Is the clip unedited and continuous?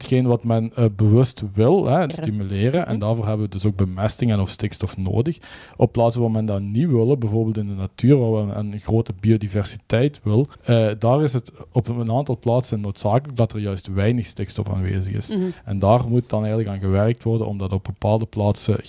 no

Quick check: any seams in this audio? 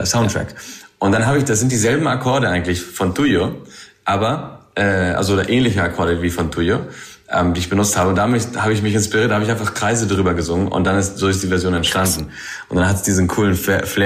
no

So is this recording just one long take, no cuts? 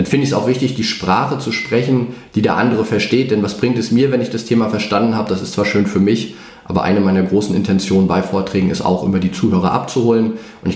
yes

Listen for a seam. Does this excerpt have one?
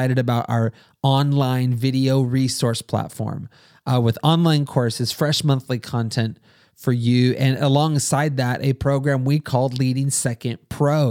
no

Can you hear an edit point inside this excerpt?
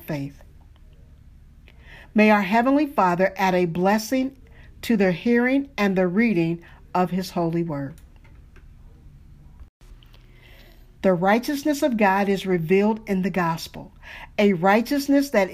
yes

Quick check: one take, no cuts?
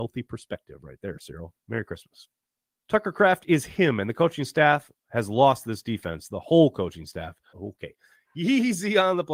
no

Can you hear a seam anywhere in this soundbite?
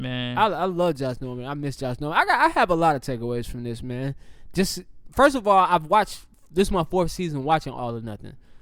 no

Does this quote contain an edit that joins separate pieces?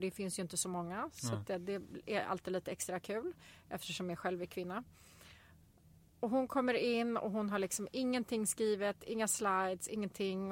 no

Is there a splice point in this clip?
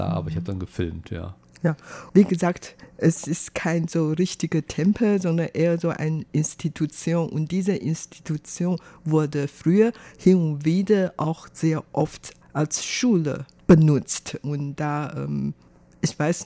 no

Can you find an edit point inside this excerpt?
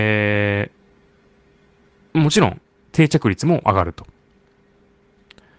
no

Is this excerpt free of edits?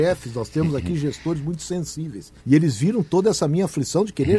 no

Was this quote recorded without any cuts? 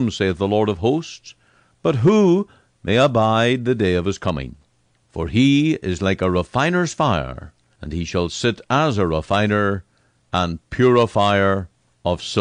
no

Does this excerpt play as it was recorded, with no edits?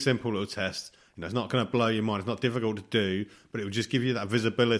yes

